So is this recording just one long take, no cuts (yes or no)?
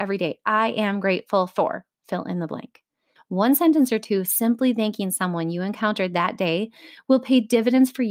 no